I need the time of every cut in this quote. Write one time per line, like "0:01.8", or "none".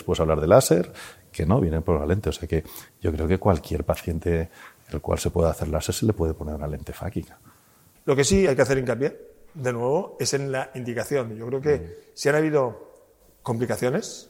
none